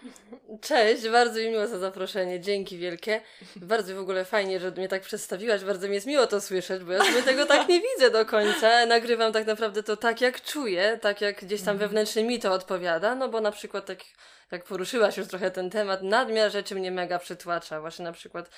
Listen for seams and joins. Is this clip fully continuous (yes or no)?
yes